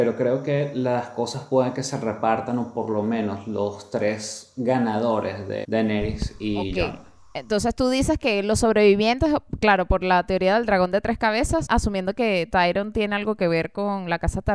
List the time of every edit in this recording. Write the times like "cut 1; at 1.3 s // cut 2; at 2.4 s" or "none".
cut 1; at 5.6 s // cut 2; at 11.7 s